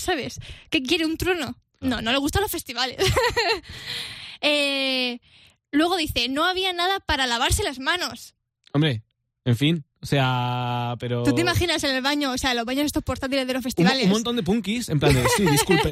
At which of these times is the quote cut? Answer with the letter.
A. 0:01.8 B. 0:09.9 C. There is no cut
A